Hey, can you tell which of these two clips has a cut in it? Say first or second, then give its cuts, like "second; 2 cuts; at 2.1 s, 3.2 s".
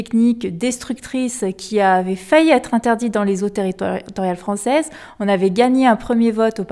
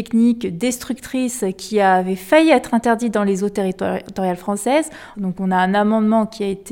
second; 1 cut; at 5.1 s